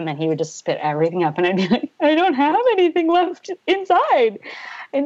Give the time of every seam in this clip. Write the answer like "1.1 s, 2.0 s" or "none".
none